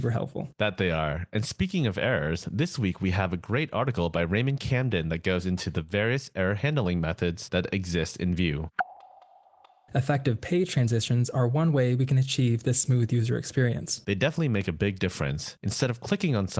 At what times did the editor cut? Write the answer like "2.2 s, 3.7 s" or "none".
9.9 s

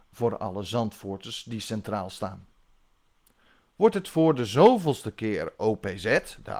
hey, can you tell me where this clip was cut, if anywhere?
none

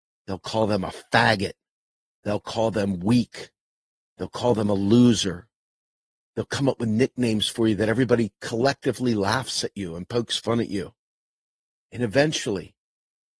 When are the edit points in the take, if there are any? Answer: none

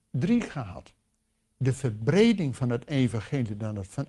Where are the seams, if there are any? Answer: none

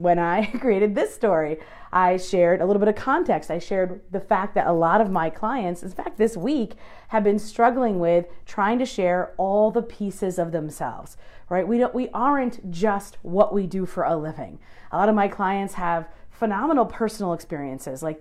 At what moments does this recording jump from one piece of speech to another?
none

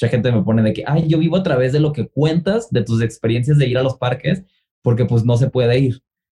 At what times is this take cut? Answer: none

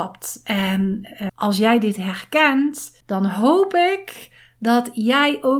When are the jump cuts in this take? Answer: 1.3 s, 3.0 s

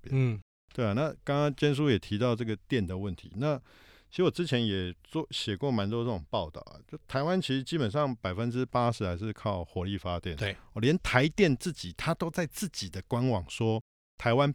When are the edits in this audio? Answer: none

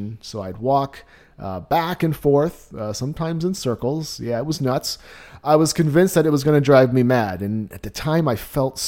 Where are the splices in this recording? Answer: none

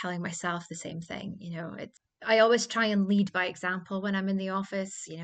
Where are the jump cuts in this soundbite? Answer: none

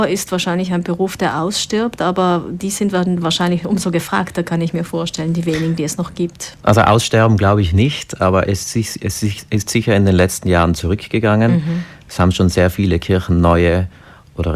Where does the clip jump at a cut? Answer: none

